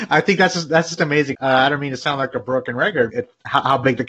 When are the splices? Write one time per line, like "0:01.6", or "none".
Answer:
0:01.3
0:03.1